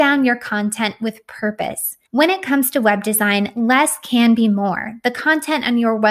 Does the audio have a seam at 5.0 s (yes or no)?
no